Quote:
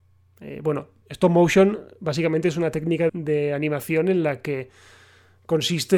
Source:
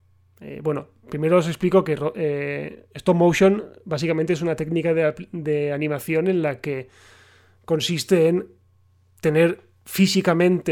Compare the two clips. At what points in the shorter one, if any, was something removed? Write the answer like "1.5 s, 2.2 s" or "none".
1.0 s, 3.1 s